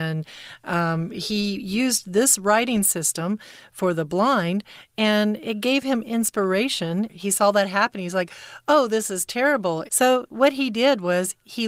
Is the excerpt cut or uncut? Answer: cut